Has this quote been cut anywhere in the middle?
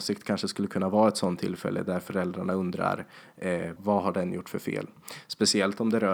yes; 1 cut; at 3.8 s

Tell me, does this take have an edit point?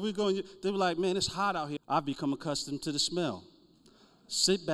yes; 1 cut; at 1.8 s

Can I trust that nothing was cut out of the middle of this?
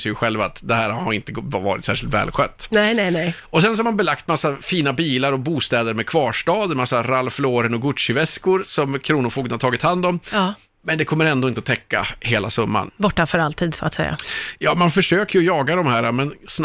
no; 1 cut; at 12.9 s

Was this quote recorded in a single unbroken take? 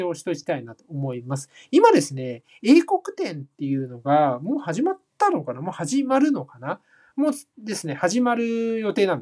yes; 0 cuts

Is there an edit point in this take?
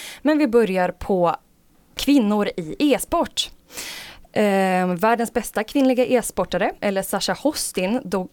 yes; 2 cuts; at 4.2 s, 6.8 s

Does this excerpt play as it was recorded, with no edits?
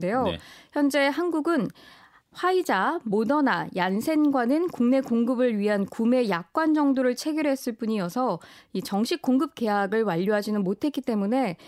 yes; 0 cuts

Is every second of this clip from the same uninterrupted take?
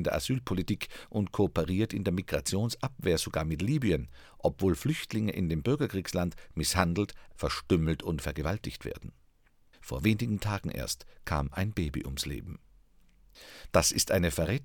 no; 3 cuts; at 7.3 s, 9.7 s, 13.7 s

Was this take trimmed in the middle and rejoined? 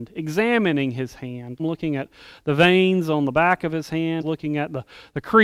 yes; 2 cuts; at 1.6 s, 4.2 s

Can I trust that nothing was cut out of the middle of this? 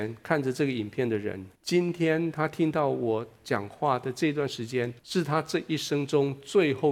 no; 2 cuts; at 1.5 s, 5.0 s

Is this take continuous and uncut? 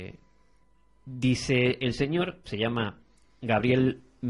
yes; 0 cuts

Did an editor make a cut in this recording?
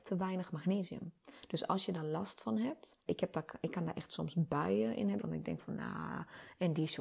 yes; 2 cuts; at 3.1 s, 5.2 s

